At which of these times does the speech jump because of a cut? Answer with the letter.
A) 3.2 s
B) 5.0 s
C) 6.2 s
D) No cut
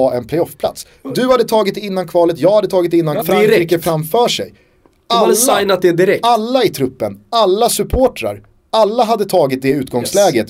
A